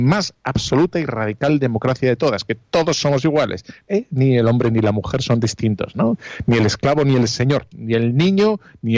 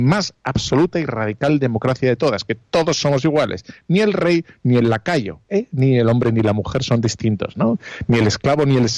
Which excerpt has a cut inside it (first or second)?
first